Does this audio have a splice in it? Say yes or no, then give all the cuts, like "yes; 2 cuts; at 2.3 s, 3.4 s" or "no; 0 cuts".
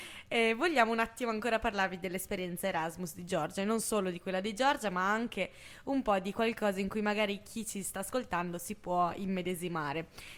no; 0 cuts